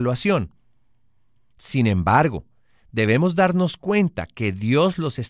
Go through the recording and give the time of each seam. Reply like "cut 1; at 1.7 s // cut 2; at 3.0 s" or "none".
none